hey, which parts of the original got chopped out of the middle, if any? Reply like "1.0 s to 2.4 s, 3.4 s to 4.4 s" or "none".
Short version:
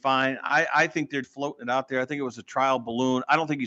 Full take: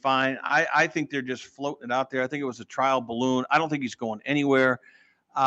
1.2 s to 1.5 s